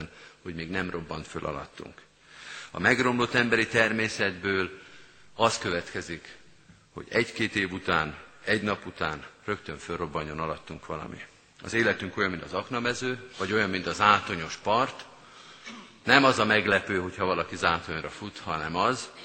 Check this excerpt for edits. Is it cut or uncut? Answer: uncut